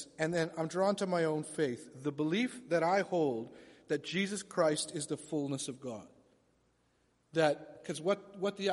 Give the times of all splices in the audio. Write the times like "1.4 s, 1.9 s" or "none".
none